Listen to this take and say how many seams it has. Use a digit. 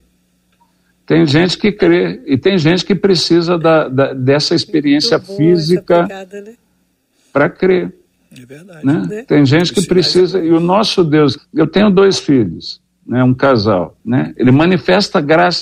2